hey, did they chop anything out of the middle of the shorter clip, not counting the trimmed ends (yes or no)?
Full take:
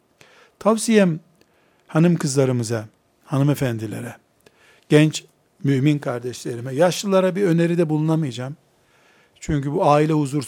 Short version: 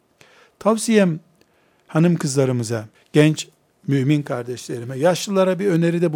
yes